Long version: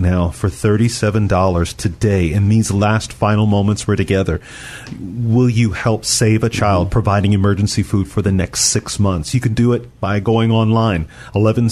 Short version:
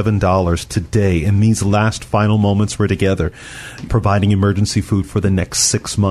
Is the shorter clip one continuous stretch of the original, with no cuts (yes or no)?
no